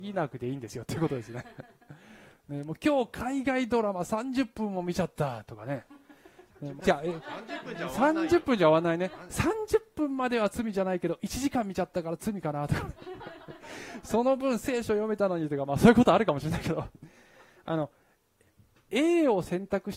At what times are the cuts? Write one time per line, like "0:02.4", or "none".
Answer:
0:06.8